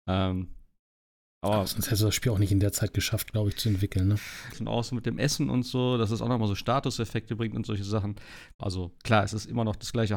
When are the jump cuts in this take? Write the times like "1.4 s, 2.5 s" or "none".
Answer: 4.5 s, 8.6 s